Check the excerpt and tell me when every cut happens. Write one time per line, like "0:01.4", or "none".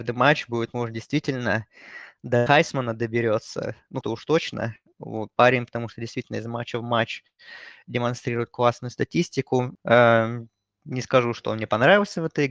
0:04.0
0:09.7